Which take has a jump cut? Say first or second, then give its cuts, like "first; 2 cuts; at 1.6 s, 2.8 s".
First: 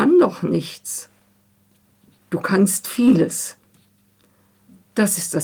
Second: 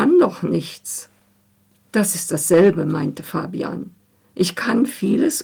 second; 1 cut; at 1.8 s